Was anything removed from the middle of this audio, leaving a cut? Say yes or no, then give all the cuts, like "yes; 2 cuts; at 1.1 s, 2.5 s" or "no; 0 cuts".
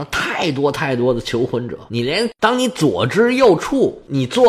yes; 1 cut; at 1.9 s